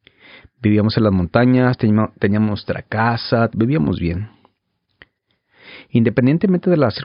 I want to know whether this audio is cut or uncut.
cut